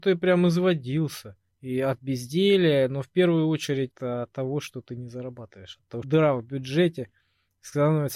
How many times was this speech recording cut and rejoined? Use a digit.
2